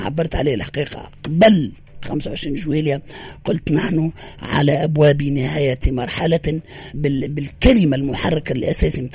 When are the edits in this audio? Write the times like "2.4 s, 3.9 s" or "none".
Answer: 6.9 s